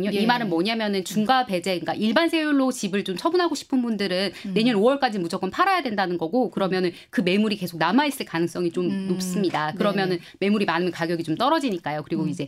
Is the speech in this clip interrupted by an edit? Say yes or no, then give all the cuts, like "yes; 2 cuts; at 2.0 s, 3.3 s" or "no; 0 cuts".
no; 0 cuts